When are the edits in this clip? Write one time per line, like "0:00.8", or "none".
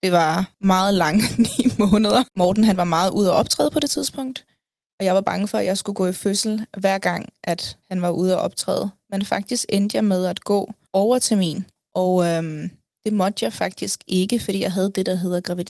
0:02.3

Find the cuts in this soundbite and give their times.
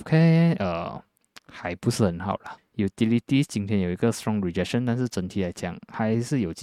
0:02.6

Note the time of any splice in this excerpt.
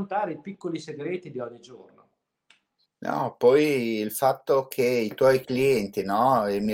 none

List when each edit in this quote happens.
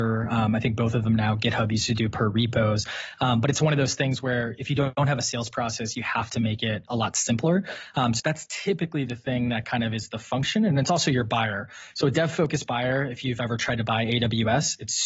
0:08.2

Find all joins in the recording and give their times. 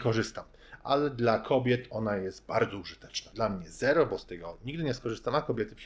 0:03.3

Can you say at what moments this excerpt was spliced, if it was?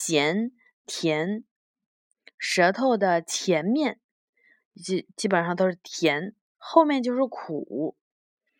none

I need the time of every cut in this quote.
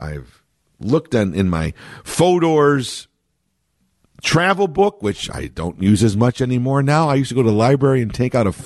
none

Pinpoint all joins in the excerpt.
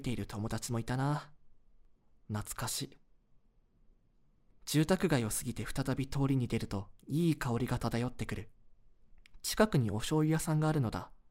0:07.0

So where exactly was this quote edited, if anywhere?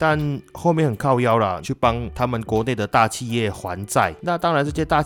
0:01.6

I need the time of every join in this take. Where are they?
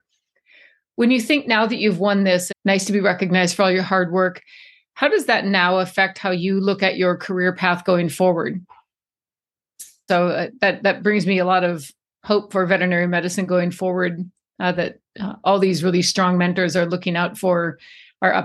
0:02.5
0:10.1

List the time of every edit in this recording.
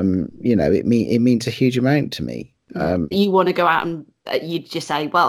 0:03.1

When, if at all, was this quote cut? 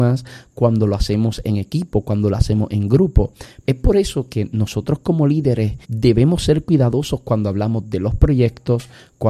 0:03.6
0:05.8

